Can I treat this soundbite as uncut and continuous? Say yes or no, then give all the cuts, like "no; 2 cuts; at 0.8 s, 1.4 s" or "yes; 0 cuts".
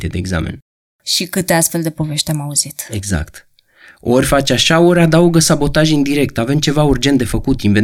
yes; 0 cuts